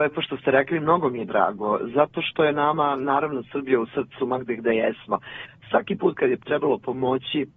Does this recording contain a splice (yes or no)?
no